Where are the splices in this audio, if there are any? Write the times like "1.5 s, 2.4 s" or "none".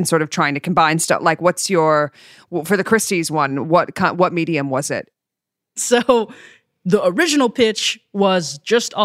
none